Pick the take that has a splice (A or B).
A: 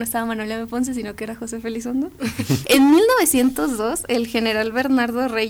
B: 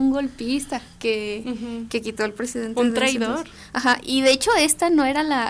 A